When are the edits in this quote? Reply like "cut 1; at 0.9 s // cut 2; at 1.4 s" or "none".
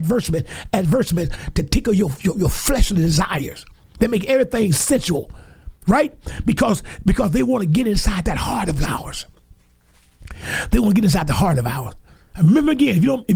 cut 1; at 1.3 s